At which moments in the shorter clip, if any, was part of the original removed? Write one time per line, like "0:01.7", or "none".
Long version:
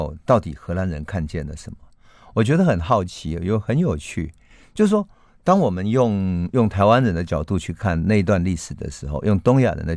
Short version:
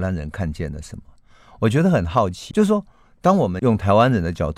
0:02.5
0:03.6